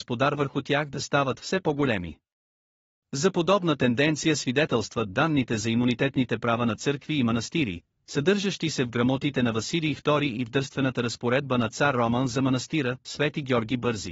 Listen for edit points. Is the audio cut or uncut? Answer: uncut